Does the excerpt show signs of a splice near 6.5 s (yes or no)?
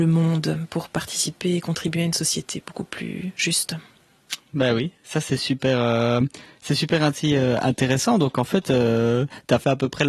no